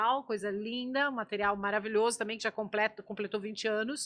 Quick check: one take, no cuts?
yes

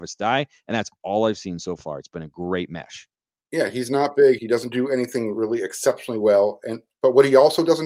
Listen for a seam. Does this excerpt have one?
yes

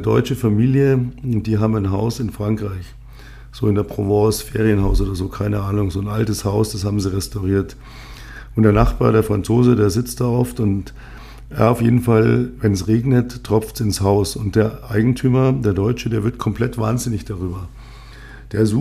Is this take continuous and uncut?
yes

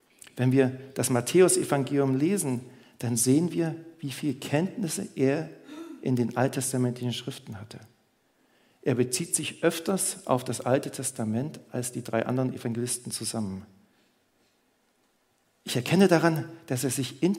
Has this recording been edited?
no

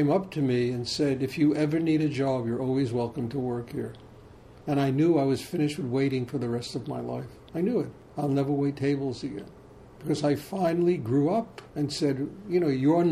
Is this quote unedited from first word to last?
yes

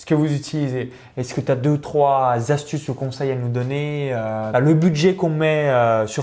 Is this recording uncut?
no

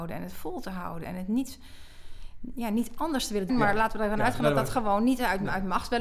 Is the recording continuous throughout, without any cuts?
no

